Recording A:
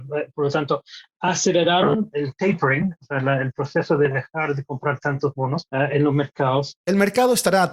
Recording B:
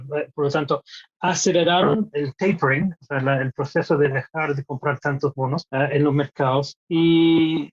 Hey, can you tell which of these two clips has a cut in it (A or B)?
A